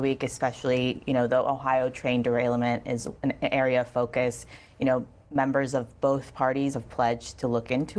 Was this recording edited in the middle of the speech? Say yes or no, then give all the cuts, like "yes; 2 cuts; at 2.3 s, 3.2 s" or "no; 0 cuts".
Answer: yes; 1 cut; at 6.7 s